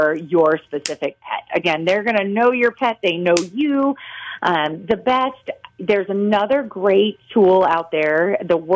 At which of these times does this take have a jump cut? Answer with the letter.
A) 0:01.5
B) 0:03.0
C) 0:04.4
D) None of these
D